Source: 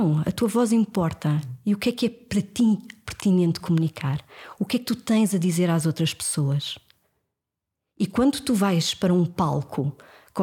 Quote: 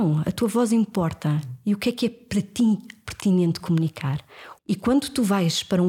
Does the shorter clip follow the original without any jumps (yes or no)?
no